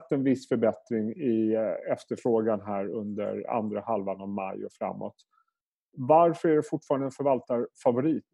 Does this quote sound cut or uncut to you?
uncut